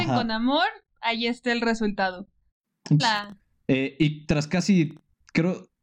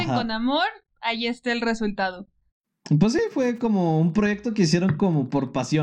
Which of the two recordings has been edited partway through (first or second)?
first